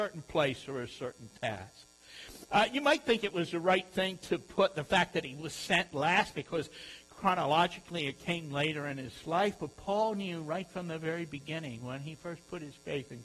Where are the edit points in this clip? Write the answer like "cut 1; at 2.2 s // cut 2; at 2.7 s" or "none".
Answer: cut 1; at 2.5 s